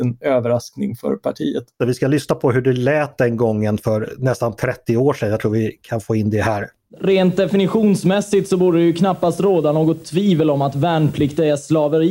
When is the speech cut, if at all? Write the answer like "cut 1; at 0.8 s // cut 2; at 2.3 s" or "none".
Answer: cut 1; at 1.8 s